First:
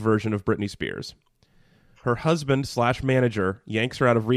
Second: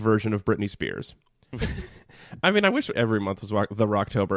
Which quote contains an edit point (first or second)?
second